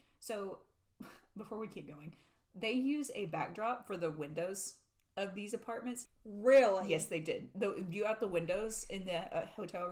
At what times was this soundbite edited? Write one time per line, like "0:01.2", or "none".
0:06.1